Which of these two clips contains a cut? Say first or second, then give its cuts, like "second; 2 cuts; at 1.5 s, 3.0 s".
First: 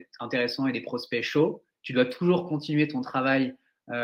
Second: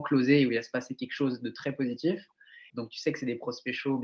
second; 1 cut; at 2.7 s